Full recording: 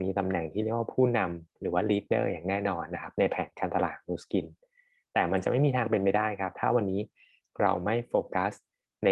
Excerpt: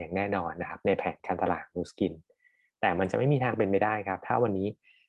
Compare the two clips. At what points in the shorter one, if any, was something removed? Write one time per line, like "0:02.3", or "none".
none